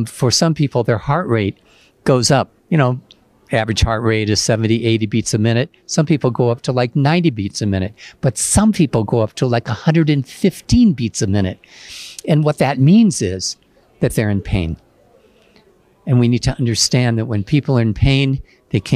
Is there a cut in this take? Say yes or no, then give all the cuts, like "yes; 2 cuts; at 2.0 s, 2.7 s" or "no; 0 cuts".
yes; 1 cut; at 2.6 s